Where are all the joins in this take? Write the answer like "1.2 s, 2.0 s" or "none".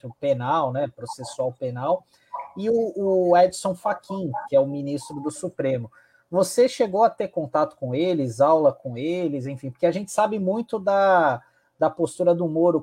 none

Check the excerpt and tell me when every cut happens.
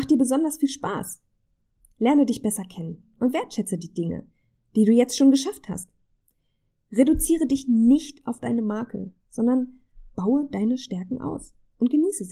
none

